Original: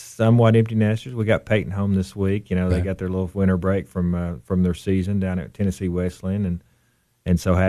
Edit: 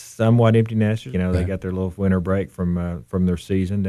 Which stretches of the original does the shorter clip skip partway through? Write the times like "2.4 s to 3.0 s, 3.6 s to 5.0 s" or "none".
1.1 s to 2.5 s